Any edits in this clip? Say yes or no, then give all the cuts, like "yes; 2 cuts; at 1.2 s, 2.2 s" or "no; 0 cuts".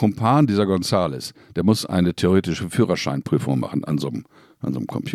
no; 0 cuts